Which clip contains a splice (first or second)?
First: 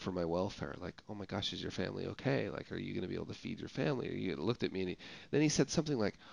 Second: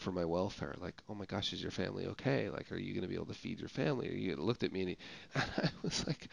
second